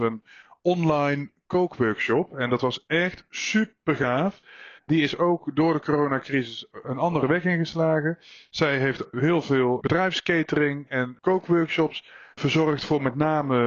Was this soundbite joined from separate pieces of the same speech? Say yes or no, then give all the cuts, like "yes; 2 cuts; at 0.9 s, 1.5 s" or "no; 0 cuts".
yes; 2 cuts; at 4.8 s, 12.3 s